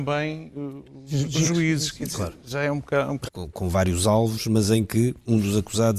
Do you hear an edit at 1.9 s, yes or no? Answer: no